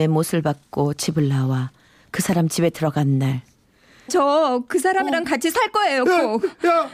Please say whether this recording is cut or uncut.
cut